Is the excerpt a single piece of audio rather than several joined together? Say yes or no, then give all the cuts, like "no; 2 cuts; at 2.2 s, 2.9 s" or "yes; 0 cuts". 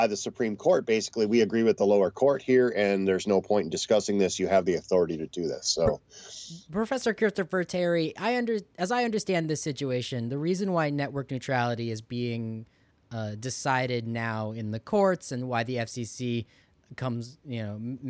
yes; 0 cuts